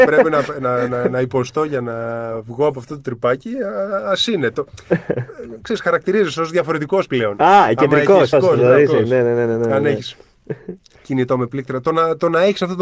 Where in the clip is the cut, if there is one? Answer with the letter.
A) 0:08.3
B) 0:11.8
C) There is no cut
A